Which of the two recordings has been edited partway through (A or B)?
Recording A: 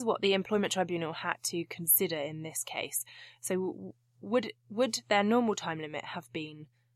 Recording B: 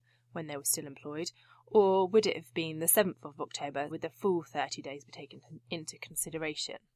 B